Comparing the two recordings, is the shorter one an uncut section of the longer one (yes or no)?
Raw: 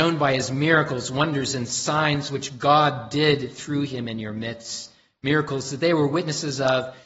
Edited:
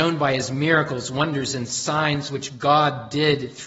yes